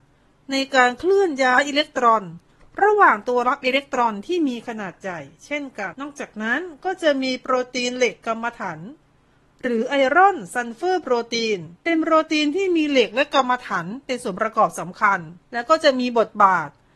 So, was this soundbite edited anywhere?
yes; 3 cuts; at 5.9 s, 11.8 s, 15.4 s

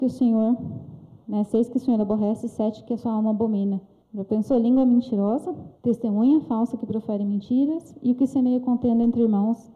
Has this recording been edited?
yes; 2 cuts; at 4.0 s, 5.8 s

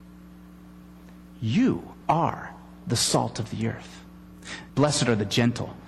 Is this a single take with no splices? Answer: no; 2 cuts; at 2.0 s, 4.7 s

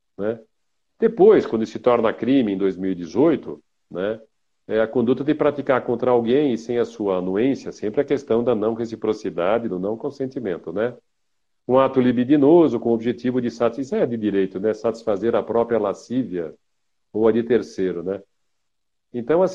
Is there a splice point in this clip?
no; 0 cuts

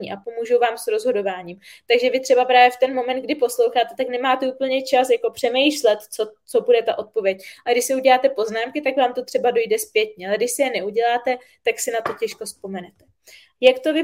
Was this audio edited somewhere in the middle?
no; 0 cuts

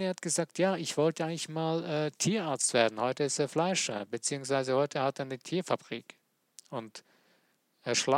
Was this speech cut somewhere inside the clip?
no; 0 cuts

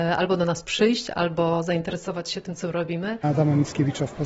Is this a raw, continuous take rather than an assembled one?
no; 1 cut; at 3.2 s

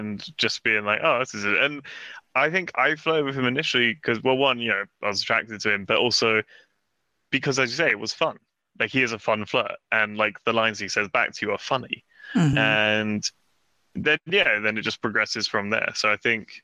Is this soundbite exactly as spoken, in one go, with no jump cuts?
yes; 0 cuts

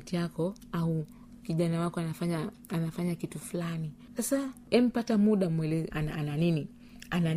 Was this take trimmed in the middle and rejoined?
yes; 1 cut; at 5.9 s

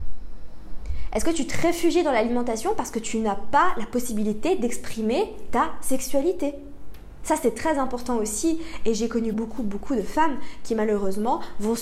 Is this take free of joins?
no; 1 cut; at 9.3 s

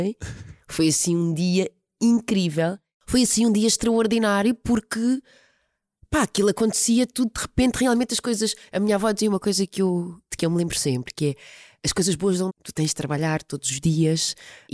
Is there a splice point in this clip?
yes; 1 cut; at 12.5 s

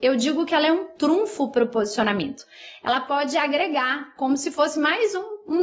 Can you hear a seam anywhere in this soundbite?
no; 0 cuts

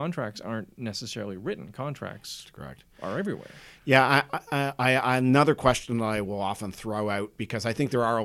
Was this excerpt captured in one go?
yes; 0 cuts

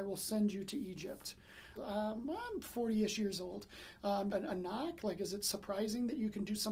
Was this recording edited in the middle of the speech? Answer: yes; 2 cuts; at 1.8 s, 4.3 s

